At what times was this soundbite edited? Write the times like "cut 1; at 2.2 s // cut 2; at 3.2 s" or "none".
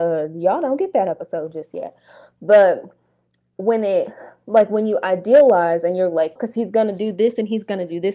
cut 1; at 6.4 s